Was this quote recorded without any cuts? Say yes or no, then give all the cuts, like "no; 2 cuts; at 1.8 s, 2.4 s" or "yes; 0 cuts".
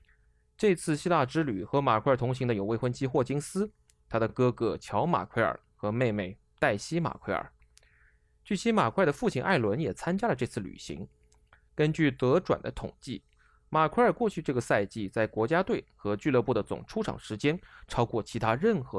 yes; 0 cuts